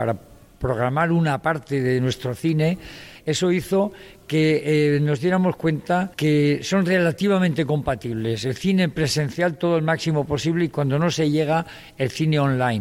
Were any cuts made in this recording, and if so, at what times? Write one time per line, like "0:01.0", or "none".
0:06.1